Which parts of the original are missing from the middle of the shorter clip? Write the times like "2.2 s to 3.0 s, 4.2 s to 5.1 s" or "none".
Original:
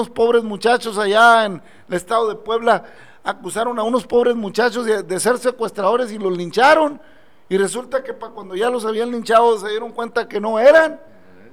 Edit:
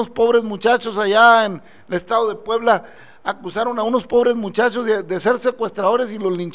none